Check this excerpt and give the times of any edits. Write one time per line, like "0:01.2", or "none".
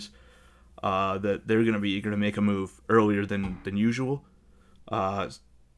0:04.8